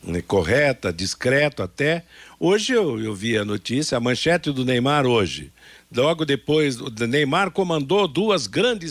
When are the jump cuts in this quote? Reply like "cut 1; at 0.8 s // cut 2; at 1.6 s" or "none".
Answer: none